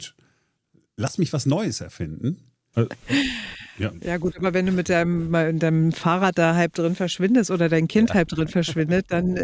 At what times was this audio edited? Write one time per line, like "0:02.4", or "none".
0:02.7